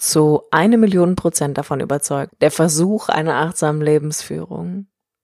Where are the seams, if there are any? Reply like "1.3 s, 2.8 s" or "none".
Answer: 2.3 s